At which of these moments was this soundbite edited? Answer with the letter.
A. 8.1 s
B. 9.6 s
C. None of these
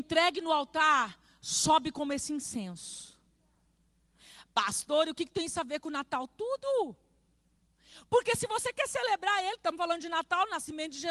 C